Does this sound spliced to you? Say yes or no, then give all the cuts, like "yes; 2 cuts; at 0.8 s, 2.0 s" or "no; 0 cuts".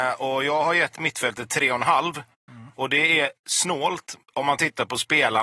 no; 0 cuts